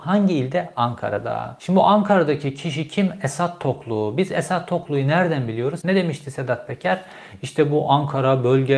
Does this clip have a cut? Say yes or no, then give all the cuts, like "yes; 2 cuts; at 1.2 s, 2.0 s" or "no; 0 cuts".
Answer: yes; 1 cut; at 5.8 s